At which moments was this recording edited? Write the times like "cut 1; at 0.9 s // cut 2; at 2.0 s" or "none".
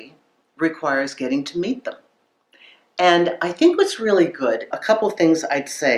cut 1; at 4.7 s